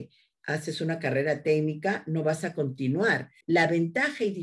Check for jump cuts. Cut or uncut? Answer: cut